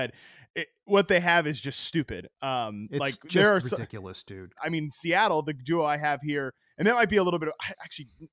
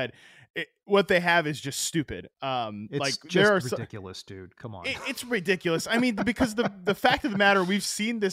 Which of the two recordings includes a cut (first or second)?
first